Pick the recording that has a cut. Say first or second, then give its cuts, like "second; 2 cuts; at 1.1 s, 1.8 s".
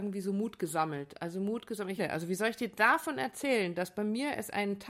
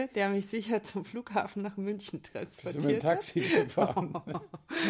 first; 1 cut; at 2.0 s